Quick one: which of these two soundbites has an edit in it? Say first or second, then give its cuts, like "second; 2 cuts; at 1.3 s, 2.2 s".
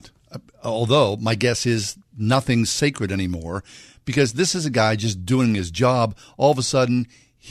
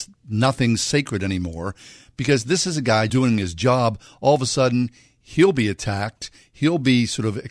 second; 1 cut; at 3.1 s